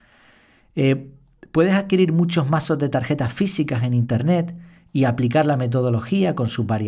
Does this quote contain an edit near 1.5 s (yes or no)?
no